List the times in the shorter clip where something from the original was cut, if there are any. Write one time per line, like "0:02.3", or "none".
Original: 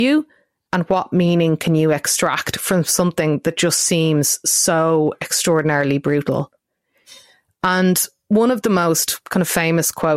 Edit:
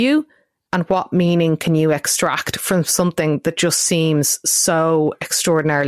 none